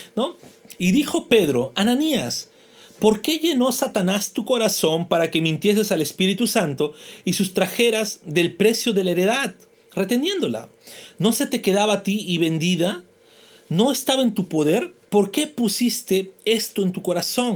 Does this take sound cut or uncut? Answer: uncut